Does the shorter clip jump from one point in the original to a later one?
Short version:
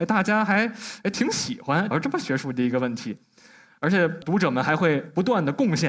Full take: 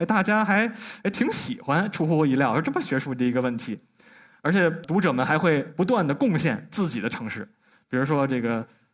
yes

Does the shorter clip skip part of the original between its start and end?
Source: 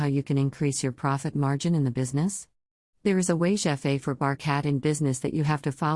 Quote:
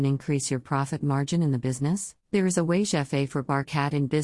yes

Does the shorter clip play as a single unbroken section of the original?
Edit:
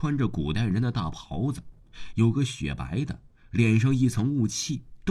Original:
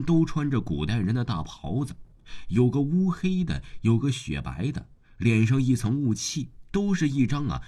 no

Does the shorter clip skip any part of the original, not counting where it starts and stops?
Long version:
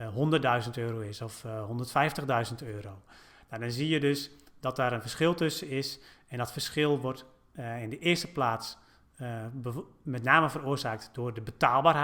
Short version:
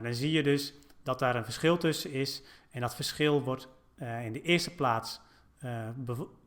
no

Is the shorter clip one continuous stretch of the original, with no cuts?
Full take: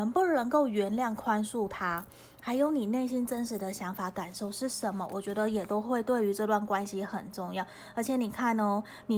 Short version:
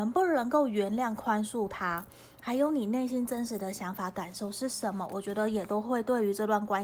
yes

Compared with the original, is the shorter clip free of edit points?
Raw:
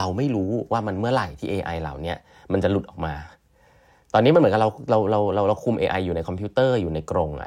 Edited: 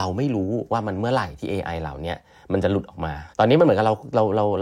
no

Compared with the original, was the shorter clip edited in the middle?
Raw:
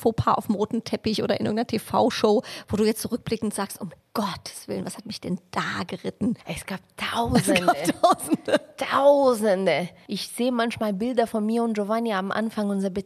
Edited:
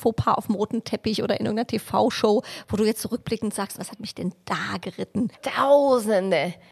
yes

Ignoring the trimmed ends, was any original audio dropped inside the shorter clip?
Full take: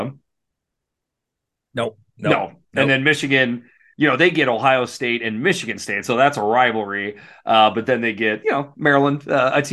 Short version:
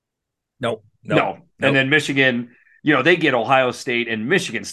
no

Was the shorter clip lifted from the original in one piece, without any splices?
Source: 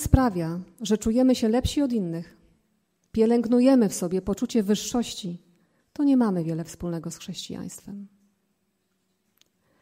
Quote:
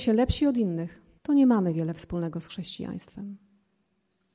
no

